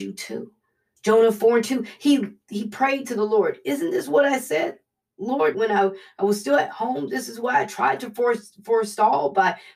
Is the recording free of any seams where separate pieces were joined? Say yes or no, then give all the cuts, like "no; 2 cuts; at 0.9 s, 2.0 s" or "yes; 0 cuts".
yes; 0 cuts